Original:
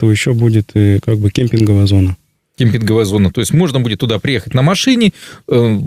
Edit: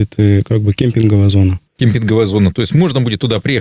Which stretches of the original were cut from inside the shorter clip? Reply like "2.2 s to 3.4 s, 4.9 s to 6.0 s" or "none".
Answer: 2.2 s to 2.5 s

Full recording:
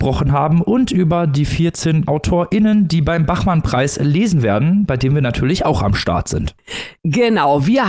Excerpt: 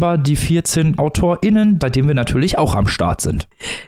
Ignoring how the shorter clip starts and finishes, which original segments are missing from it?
2.9 s to 4.9 s

